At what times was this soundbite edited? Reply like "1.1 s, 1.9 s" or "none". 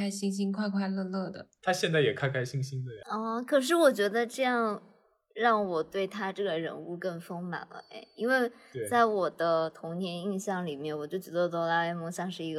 none

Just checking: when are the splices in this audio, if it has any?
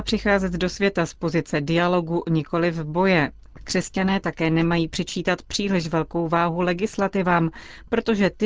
none

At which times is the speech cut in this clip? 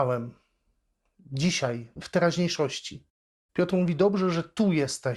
3.5 s

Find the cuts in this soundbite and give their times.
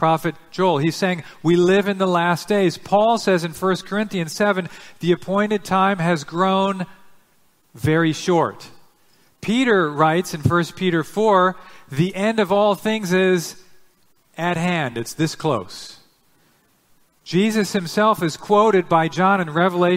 none

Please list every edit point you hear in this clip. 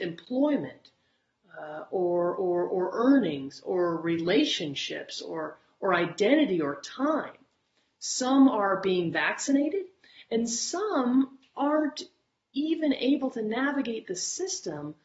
none

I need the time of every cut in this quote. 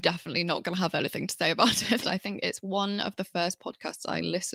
2.0 s

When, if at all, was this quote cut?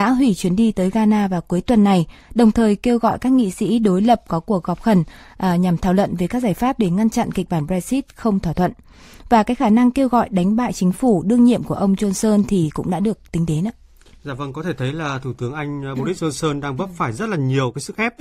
none

